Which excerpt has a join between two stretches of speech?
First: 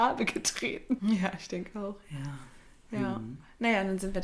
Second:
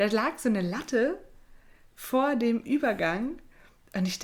first; 1 cut; at 1.0 s

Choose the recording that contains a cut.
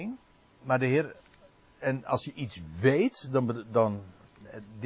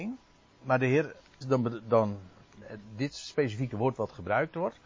second; 1 cut; at 1.4 s

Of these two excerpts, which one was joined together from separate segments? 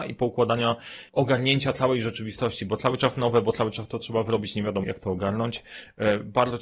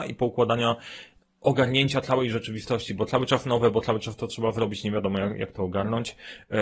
first; 2 cuts; at 1.1 s, 4.8 s

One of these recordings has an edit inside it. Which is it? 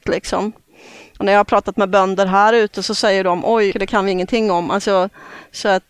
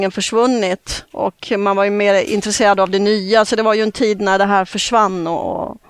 first; 1 cut; at 3.7 s

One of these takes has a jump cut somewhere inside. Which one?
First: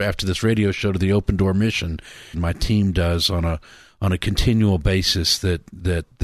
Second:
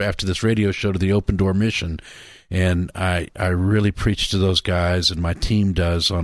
first; 1 cut; at 2.3 s

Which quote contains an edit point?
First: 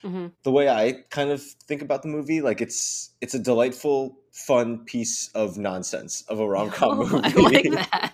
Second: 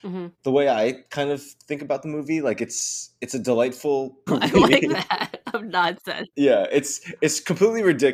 second; 1 cut; at 4.3 s

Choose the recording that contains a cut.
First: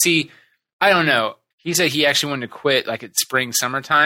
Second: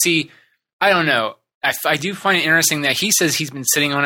first; 1 cut; at 1.5 s

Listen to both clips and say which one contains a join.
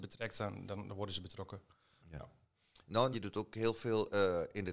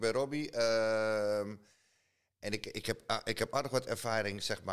first; 1 cut; at 3.1 s

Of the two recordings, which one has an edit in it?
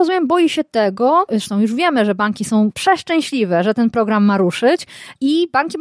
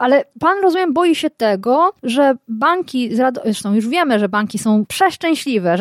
first; 1 cut; at 1.3 s

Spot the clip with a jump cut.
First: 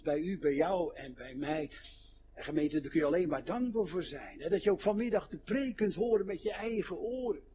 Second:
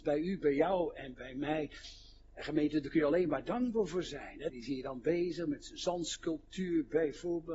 second; 1 cut; at 4.5 s

